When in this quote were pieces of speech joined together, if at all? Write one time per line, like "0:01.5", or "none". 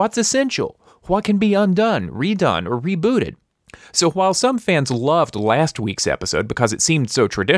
none